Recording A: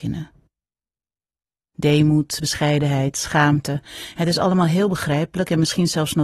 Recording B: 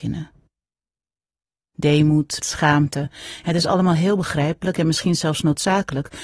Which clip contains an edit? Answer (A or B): B